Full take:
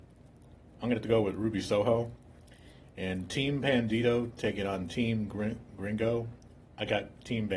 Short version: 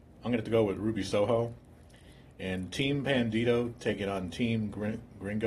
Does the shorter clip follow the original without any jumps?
yes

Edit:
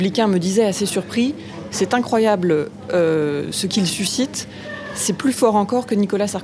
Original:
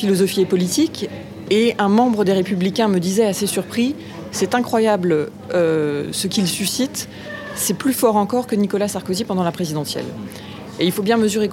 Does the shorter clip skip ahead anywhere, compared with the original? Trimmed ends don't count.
no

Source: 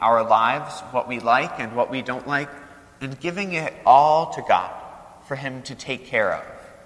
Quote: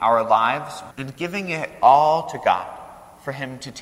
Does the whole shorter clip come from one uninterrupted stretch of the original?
no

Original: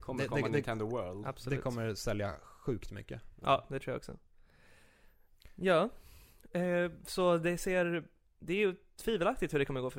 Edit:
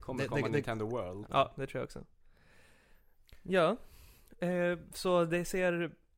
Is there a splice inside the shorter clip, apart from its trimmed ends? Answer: yes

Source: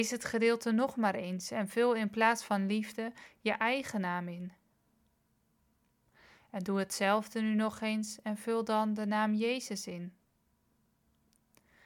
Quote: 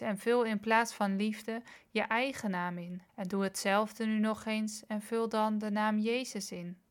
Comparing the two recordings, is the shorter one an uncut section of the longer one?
no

